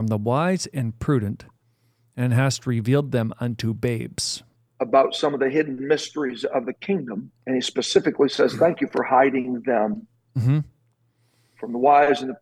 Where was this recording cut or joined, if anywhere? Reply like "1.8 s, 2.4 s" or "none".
4.7 s, 7.4 s